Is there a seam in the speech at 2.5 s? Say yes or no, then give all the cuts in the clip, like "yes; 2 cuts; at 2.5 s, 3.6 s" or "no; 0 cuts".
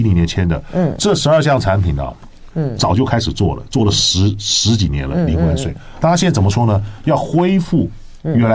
yes; 1 cut; at 2.5 s